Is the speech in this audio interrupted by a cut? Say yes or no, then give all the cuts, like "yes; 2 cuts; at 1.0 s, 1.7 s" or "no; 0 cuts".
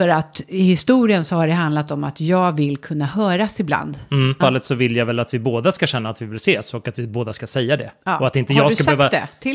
yes; 1 cut; at 4.4 s